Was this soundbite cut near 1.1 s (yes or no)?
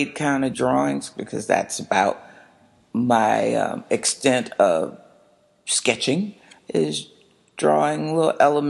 no